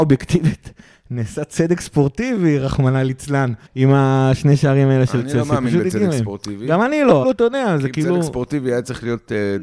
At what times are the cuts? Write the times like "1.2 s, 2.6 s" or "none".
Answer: 3.7 s, 7.2 s